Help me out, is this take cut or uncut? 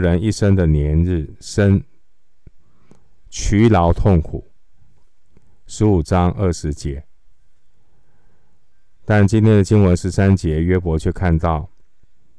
uncut